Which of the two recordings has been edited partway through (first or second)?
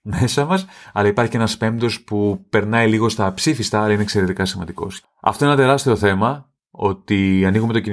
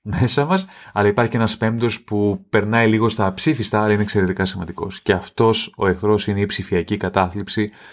first